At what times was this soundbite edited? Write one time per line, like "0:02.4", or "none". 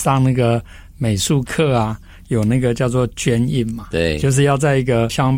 none